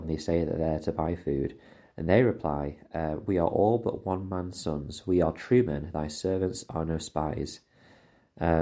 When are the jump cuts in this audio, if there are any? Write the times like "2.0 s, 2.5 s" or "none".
none